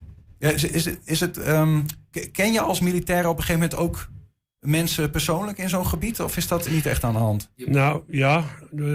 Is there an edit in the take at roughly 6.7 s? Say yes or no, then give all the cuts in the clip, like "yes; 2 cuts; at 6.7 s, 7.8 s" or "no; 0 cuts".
yes; 1 cut; at 6.7 s